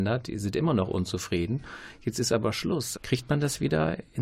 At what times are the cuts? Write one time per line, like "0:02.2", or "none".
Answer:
0:02.9